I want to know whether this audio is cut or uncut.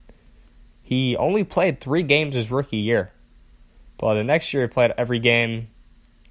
uncut